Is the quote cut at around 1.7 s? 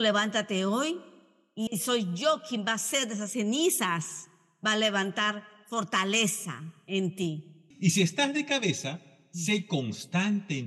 yes; 2 cuts; at 1.7 s, 7.7 s

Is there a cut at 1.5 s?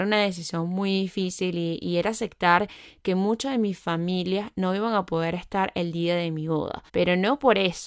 no; 1 cut; at 6.9 s

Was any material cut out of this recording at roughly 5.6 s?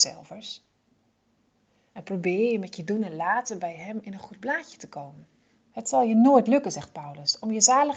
yes; 1 cut; at 5.6 s

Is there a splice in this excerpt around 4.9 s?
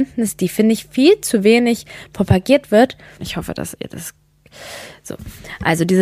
no; 1 cut; at 3.2 s

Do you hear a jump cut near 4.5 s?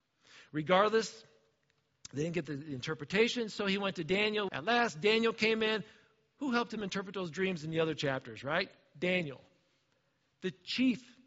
yes; 1 cut; at 4.5 s

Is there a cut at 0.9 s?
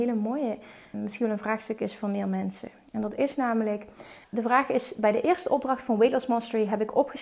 yes; 2 cuts; at 0.9 s, 4.2 s

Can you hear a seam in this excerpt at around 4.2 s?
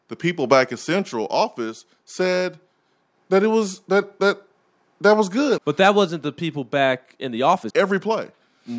no; 2 cuts; at 5.6 s, 7.7 s

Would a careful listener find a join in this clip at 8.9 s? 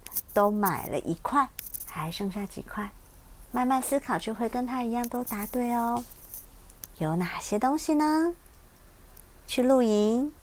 no; 2 cuts; at 3.4 s, 6.9 s

